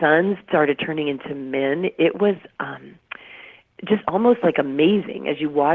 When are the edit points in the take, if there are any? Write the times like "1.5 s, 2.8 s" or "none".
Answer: none